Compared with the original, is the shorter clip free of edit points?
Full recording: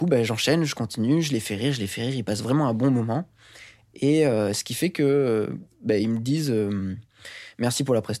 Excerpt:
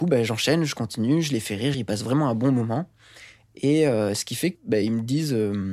no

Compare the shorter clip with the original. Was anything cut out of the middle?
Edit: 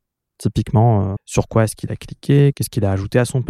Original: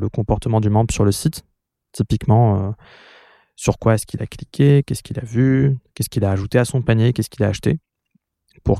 yes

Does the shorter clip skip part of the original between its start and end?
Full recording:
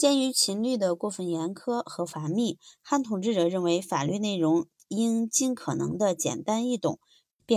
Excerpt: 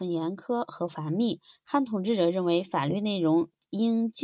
no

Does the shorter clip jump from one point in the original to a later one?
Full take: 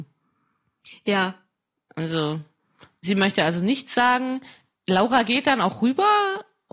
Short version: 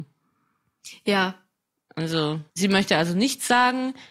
yes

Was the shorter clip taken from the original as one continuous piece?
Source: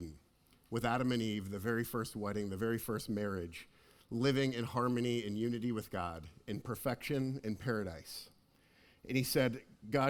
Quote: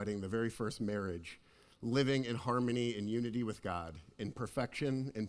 yes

